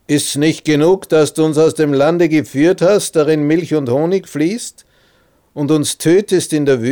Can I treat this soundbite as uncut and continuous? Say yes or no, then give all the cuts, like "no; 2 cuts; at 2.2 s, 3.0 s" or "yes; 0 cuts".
yes; 0 cuts